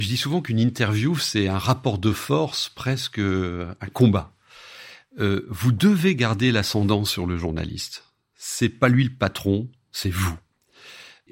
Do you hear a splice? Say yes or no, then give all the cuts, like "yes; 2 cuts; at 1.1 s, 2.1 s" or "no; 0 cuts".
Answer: no; 0 cuts